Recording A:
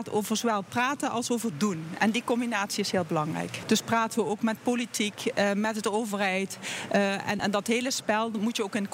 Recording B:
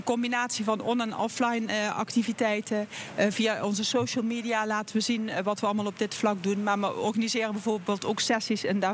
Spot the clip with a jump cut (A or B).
A